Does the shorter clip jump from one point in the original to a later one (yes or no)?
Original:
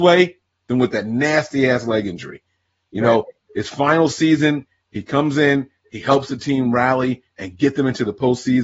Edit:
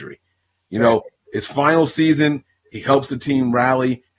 yes